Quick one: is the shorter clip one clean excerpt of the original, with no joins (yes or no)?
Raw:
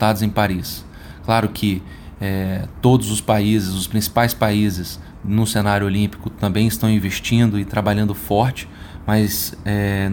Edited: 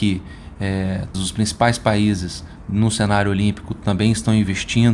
no